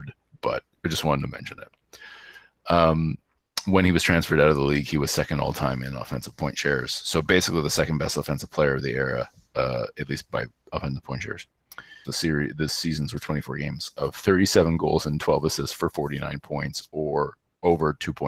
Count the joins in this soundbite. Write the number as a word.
one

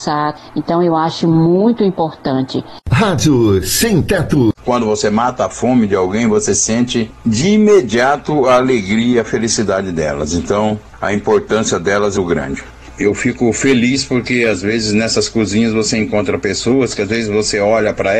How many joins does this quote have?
two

